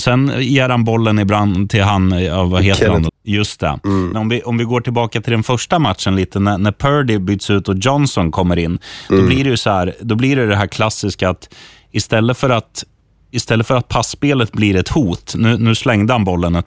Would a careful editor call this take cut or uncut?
cut